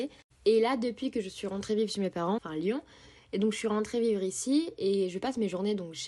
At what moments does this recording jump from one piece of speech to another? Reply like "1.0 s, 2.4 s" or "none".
2.4 s